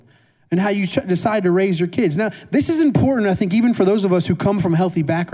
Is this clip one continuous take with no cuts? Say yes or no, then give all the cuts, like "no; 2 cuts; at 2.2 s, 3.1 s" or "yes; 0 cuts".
yes; 0 cuts